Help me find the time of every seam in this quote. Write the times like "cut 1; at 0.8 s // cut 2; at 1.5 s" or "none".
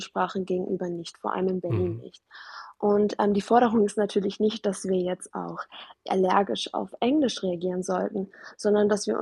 none